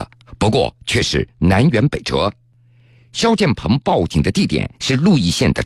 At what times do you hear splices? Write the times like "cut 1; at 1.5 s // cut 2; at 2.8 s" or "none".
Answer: none